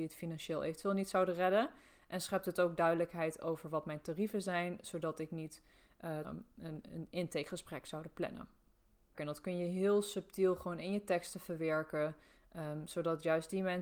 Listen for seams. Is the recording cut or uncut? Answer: cut